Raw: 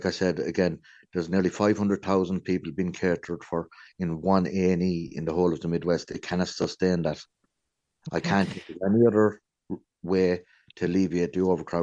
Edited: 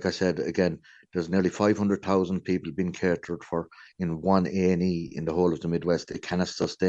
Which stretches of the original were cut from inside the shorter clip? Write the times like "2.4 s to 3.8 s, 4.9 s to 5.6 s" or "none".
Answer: none